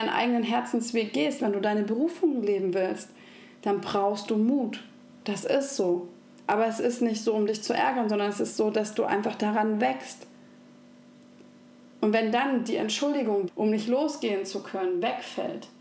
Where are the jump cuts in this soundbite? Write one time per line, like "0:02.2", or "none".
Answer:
0:13.5